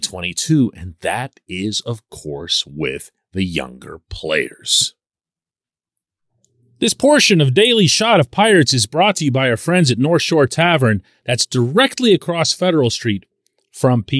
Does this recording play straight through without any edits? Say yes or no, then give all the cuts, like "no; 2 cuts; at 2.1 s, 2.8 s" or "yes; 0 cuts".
yes; 0 cuts